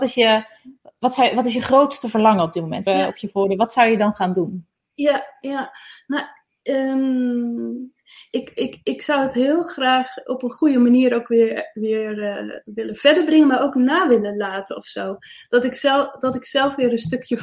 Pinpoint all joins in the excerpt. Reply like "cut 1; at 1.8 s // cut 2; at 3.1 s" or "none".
cut 1; at 2.9 s